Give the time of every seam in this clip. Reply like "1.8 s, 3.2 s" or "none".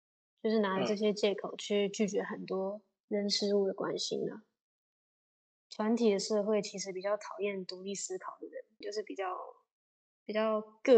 5.5 s, 8.8 s